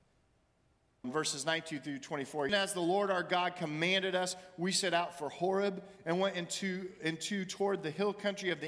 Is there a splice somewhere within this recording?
yes; 2 cuts; at 1.0 s, 2.5 s

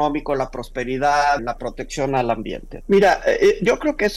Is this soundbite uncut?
no; 2 cuts; at 1.4 s, 2.8 s

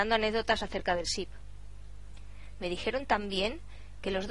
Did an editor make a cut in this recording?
yes; 1 cut; at 2.5 s

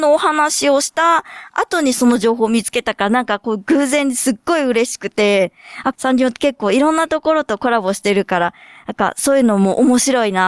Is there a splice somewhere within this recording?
yes; 1 cut; at 5.9 s

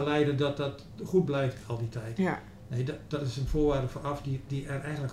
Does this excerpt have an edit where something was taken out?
no; 0 cuts

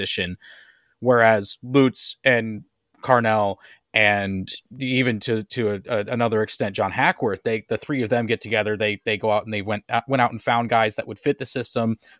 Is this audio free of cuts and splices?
yes; 0 cuts

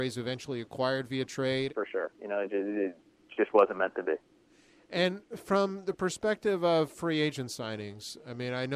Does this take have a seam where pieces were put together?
yes; 1 cut; at 1.7 s

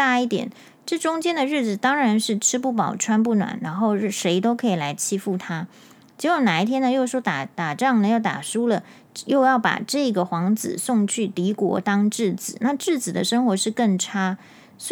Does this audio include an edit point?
no; 0 cuts

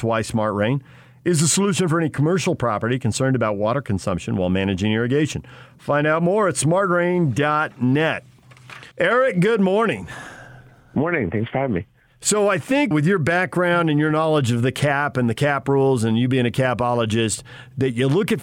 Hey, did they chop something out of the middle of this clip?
yes; 2 cuts; at 8.9 s, 12.9 s

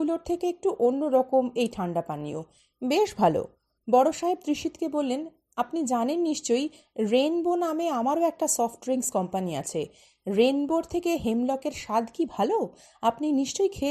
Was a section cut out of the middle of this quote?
no; 0 cuts

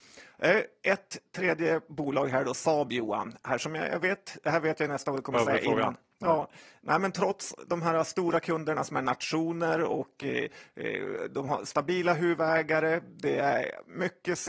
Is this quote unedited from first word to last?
yes; 0 cuts

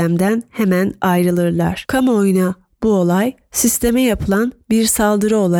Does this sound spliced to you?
yes; 1 cut; at 1.9 s

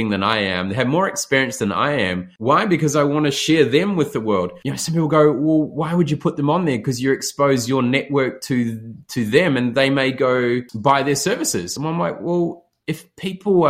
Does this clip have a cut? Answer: no; 0 cuts

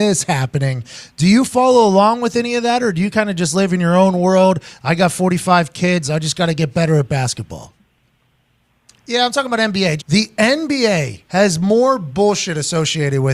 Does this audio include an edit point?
yes; 3 cuts; at 8.9 s, 10.0 s, 11.2 s

